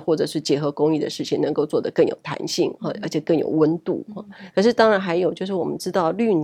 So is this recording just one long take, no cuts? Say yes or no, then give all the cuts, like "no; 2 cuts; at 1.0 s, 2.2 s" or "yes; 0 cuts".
no; 1 cut; at 4.5 s